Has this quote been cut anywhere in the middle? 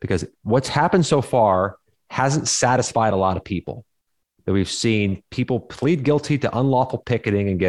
no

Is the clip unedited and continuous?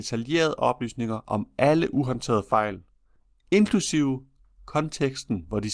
yes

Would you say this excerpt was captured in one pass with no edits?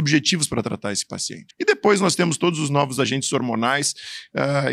no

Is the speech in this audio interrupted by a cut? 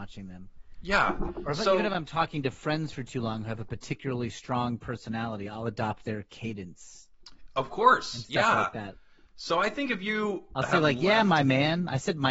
no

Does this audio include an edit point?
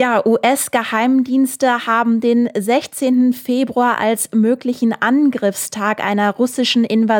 no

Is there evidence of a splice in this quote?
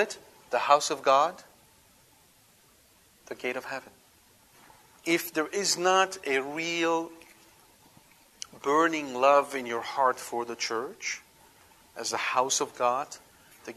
no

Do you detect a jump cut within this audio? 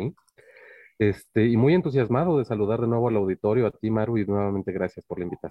no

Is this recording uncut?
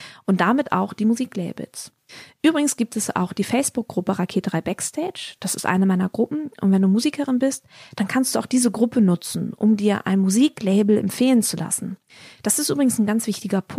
yes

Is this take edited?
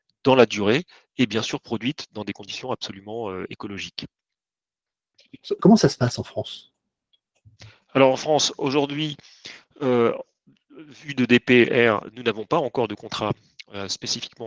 yes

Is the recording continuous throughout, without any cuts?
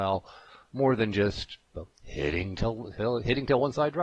yes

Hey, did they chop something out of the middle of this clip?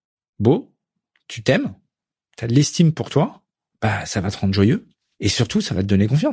no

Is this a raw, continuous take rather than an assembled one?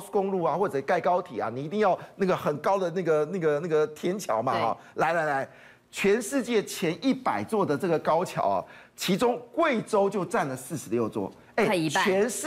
yes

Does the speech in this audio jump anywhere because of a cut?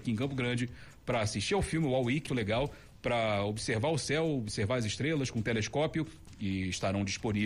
yes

